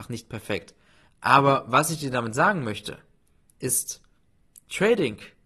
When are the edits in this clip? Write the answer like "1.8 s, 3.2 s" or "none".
1.1 s